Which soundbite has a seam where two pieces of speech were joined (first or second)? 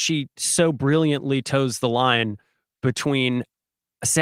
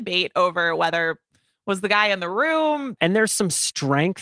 second